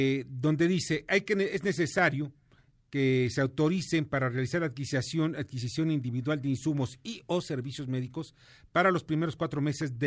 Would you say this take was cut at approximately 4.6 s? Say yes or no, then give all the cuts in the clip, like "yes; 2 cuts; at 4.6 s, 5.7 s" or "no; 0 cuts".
no; 0 cuts